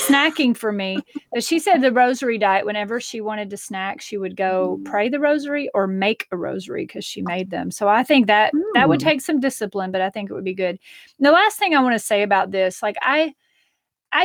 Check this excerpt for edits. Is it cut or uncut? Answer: uncut